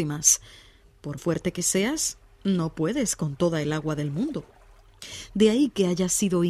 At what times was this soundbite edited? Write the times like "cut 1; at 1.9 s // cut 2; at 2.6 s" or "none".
cut 1; at 1.2 s